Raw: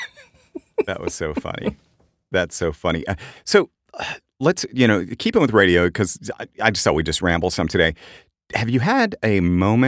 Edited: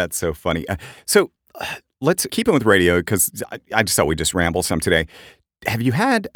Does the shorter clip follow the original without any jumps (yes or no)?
no